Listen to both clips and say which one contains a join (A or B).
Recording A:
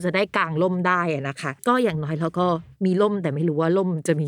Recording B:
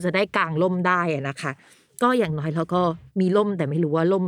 A